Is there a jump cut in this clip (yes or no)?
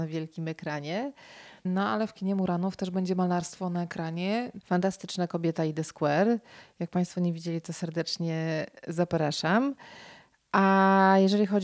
yes